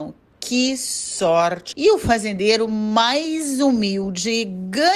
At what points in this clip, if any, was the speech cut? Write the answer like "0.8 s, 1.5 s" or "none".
1.7 s